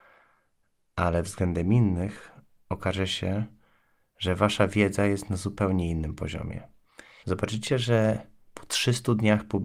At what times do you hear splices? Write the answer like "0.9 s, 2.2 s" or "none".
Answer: 7.2 s